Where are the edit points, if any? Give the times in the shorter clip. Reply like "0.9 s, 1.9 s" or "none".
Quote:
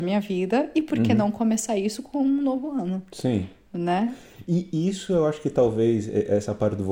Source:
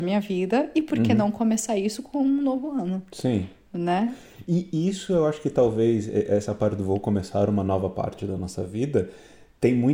none